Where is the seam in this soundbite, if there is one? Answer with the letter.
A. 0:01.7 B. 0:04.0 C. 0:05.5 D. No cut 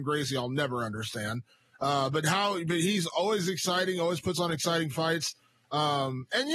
D